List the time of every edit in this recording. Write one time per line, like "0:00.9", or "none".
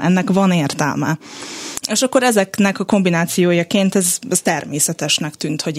0:01.8